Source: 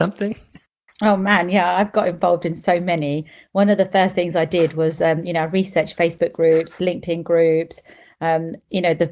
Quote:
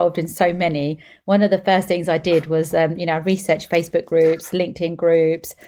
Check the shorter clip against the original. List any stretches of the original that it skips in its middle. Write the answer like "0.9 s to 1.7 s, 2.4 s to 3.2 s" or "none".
none